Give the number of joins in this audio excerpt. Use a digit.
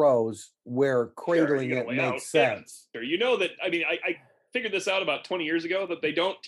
1